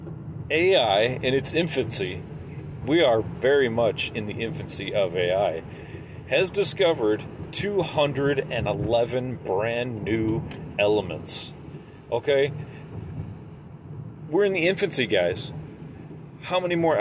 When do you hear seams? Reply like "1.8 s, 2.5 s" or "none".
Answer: 2.8 s